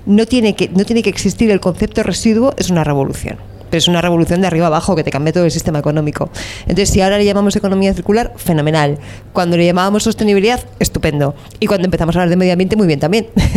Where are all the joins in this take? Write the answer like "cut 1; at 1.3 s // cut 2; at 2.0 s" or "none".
none